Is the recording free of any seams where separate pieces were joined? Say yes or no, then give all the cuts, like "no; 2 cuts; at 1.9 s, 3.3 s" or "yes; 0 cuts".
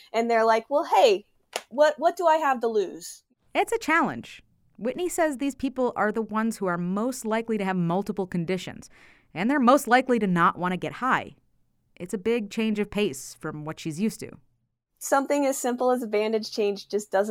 yes; 0 cuts